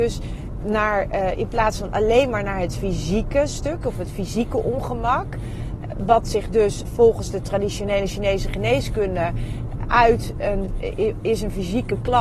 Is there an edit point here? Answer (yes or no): yes